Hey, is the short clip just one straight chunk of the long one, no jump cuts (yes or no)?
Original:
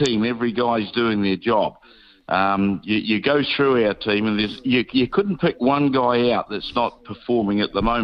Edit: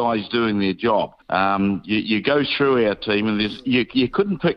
no